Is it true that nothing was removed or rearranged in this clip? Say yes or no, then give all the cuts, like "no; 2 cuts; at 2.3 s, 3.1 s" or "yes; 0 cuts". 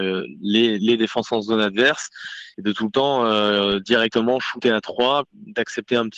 yes; 0 cuts